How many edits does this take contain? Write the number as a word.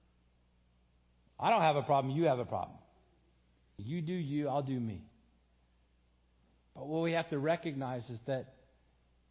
one